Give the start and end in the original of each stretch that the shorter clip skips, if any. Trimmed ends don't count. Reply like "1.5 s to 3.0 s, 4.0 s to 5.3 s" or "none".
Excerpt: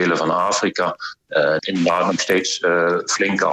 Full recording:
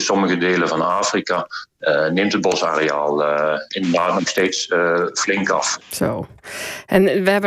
2.1 s to 3.7 s